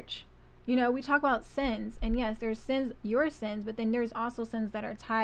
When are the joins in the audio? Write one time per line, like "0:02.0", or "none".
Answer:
none